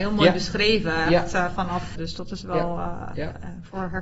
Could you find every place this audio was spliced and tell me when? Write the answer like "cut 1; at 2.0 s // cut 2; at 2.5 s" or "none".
cut 1; at 1.9 s